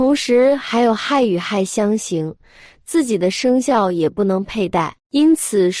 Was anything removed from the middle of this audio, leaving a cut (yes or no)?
no